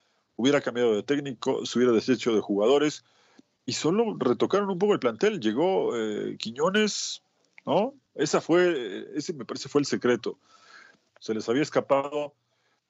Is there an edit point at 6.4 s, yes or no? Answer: no